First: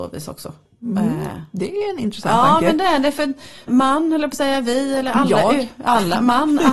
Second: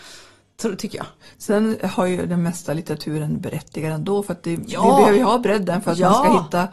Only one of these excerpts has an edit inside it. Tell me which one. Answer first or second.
first